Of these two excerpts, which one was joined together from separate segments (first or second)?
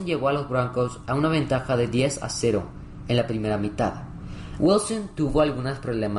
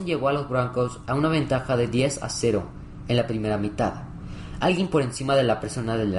first